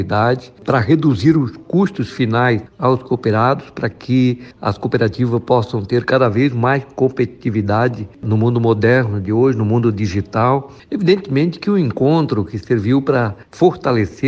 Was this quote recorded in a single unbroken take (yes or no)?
yes